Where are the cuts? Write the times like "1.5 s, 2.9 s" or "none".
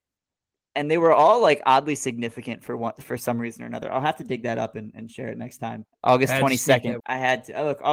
5.9 s, 7.0 s